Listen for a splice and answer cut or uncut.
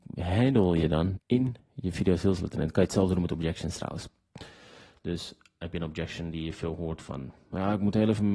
cut